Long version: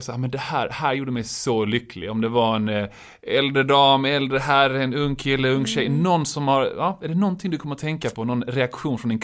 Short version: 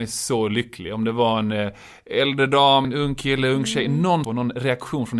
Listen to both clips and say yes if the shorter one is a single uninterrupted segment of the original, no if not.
no